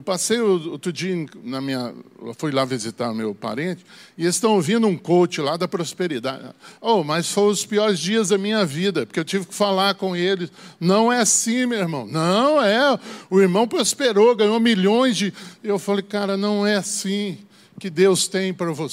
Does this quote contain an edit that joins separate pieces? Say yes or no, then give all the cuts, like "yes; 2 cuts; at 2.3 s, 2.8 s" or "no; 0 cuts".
no; 0 cuts